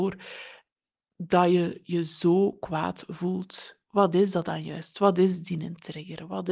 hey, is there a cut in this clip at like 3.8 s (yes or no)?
yes